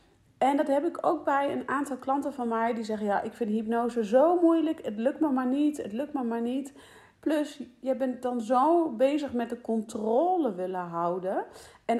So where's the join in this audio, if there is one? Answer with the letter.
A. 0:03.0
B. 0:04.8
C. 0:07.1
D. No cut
C